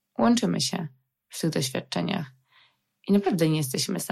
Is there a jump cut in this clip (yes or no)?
no